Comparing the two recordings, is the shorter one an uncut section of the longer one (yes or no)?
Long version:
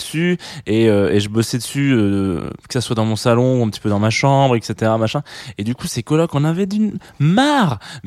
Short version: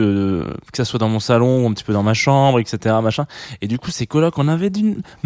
yes